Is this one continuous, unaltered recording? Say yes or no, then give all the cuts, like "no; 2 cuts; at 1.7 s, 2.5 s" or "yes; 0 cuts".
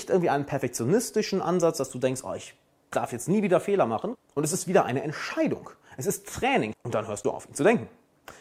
no; 2 cuts; at 4.1 s, 6.7 s